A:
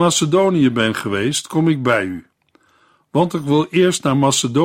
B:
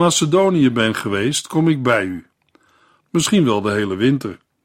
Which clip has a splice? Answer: B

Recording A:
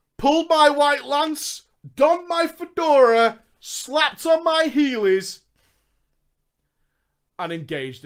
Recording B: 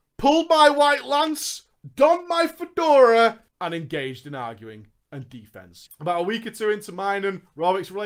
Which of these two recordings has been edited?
B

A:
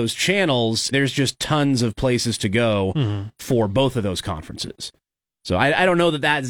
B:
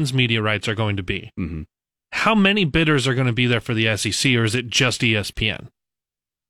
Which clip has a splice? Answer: A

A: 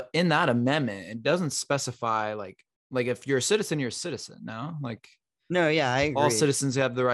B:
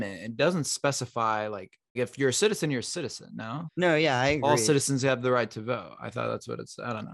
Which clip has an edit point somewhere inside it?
B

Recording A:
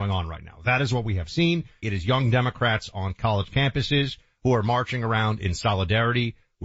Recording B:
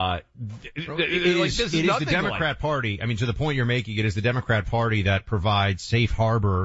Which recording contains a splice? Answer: A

